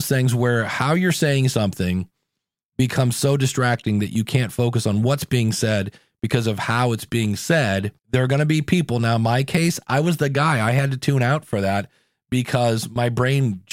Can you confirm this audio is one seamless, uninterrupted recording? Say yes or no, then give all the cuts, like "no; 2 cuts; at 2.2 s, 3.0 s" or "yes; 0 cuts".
no; 1 cut; at 8.0 s